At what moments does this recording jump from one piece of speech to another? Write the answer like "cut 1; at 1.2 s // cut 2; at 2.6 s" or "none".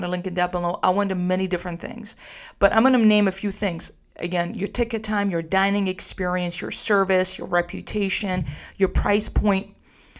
none